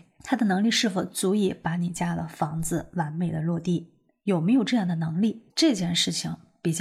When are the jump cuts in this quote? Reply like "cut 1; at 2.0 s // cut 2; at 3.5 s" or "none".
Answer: cut 1; at 5.5 s